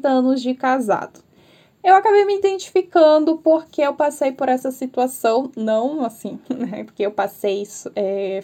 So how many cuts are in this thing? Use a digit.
1